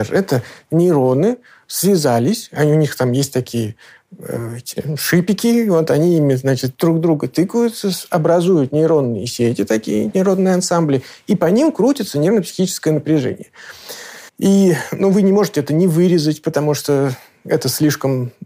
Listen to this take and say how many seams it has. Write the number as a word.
one